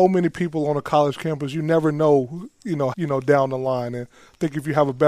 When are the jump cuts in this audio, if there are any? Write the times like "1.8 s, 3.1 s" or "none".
2.9 s